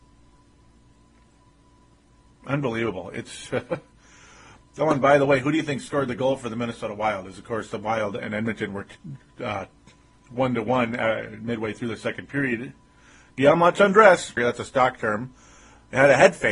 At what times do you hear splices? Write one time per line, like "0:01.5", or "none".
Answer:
0:14.4

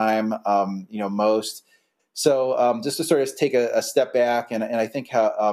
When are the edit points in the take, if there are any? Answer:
0:02.0

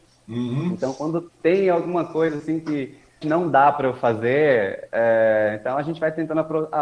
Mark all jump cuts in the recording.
0:03.2

